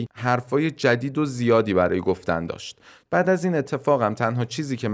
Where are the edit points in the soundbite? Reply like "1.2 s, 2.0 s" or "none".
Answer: 3.1 s

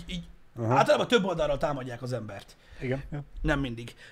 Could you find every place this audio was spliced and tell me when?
3.1 s

